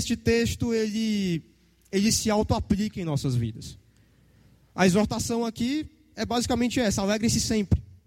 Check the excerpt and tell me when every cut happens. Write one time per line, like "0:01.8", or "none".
none